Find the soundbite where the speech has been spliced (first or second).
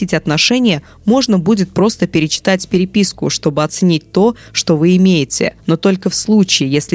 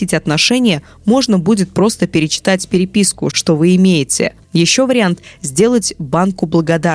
second